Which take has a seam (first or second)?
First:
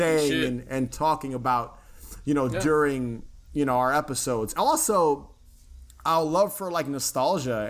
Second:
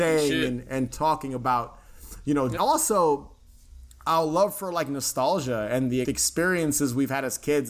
second